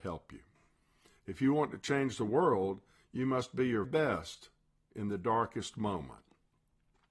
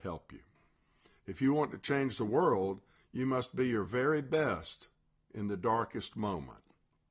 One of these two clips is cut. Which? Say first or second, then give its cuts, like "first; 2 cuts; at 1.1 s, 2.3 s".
first; 1 cut; at 3.8 s